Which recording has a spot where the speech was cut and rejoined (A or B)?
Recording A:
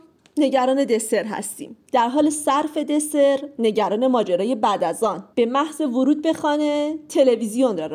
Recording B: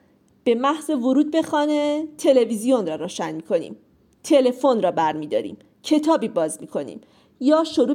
A